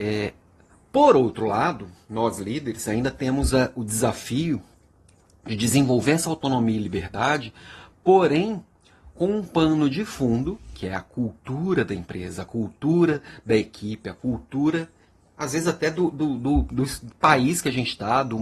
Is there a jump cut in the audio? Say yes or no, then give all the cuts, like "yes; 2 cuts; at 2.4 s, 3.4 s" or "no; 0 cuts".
no; 0 cuts